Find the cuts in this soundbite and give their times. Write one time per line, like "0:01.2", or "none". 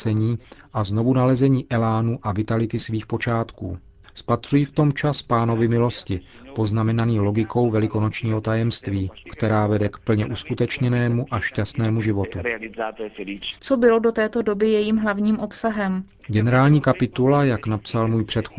0:09.3
0:13.6
0:16.2